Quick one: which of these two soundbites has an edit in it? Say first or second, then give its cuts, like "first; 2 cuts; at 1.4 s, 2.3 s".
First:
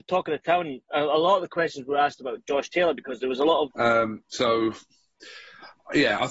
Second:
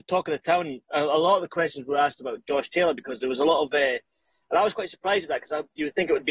first; 1 cut; at 3.7 s